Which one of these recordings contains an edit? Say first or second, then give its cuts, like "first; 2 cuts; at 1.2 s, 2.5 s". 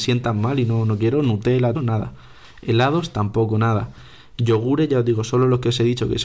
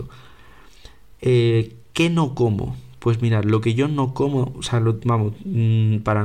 first; 1 cut; at 1.7 s